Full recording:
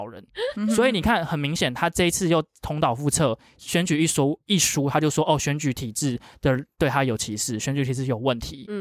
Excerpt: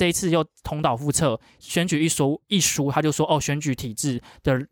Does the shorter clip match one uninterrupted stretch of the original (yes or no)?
yes